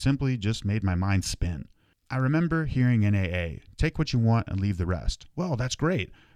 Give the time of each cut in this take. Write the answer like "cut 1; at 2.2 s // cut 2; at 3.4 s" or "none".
none